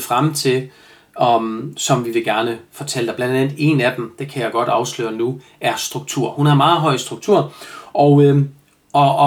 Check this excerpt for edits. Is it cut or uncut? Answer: uncut